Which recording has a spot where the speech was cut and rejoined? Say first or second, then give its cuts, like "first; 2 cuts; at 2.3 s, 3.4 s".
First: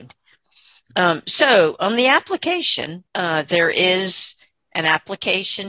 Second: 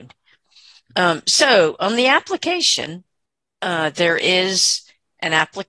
first; 1 cut; at 3.1 s